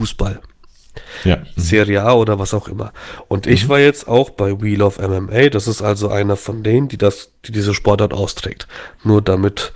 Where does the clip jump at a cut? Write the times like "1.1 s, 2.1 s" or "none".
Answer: 1.5 s